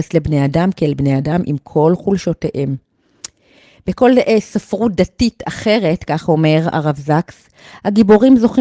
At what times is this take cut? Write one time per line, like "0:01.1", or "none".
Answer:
none